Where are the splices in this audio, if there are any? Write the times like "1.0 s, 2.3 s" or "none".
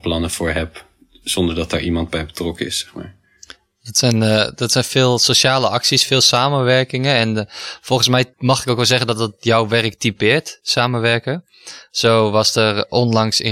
8.3 s

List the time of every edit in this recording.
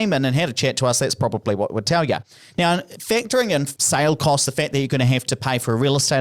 none

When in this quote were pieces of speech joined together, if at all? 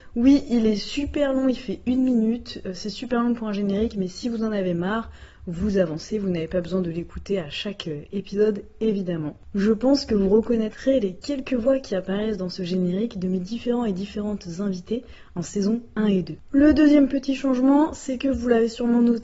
16.5 s

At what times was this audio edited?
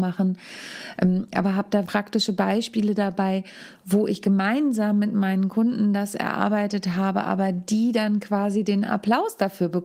1.9 s

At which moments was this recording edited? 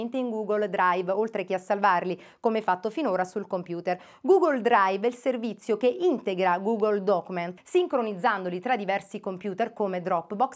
7.6 s

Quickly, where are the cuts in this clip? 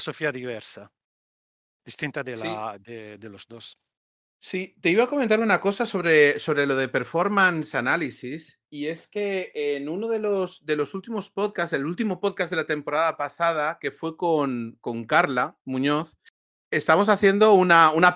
none

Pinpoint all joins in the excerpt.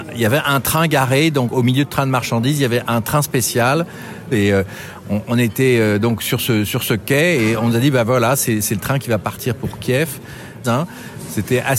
4.3 s, 10.6 s

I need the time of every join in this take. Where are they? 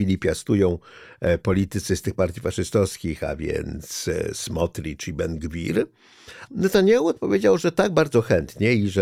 6.5 s

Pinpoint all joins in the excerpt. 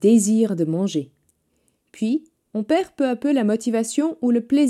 2.4 s

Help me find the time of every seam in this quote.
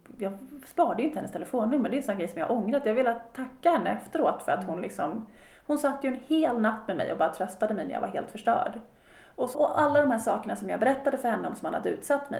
9.5 s

